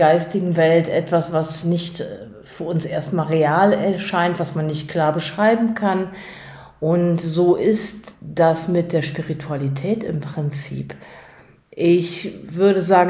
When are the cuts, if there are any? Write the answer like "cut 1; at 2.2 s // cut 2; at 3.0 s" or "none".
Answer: none